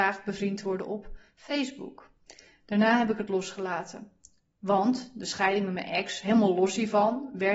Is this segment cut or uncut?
uncut